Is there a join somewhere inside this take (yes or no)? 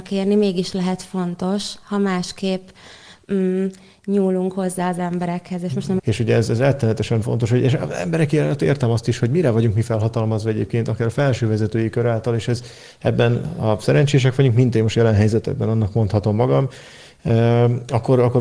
yes